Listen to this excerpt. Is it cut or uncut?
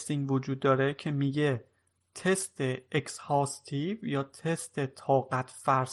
uncut